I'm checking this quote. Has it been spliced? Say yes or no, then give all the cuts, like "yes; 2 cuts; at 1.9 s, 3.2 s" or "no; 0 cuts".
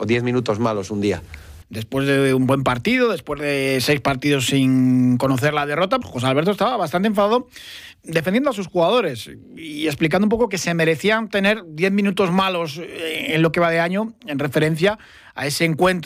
yes; 2 cuts; at 1.6 s, 6.0 s